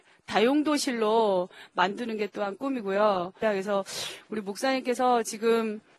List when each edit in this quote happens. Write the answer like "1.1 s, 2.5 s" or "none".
3.4 s